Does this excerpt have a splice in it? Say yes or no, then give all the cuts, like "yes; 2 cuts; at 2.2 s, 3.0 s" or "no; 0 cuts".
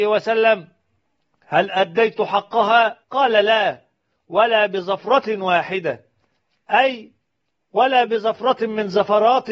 yes; 1 cut; at 3.0 s